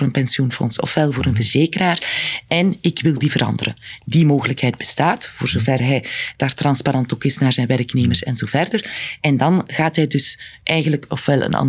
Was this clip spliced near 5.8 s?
no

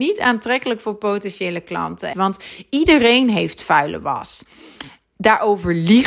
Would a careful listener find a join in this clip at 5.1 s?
no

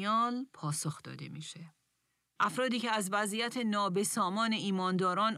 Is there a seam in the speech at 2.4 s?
yes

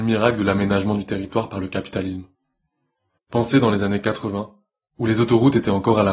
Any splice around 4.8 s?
no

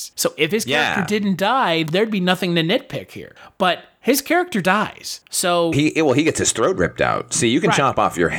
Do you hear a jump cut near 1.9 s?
yes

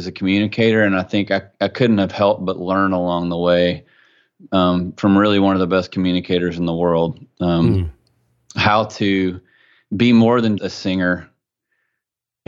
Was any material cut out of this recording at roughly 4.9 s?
no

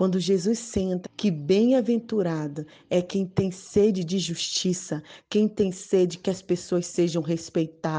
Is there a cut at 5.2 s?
yes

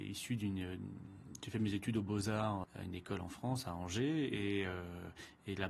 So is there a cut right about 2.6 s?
yes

